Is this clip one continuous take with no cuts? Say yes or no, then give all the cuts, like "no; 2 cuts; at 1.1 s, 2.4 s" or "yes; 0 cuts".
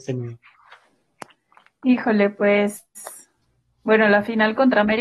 yes; 0 cuts